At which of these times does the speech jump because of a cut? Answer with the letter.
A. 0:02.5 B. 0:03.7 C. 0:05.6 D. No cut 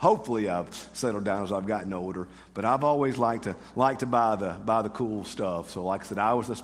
D